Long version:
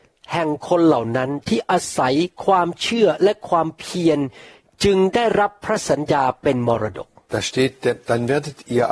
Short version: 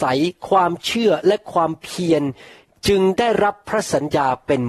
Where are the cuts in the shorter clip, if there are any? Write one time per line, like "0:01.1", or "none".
none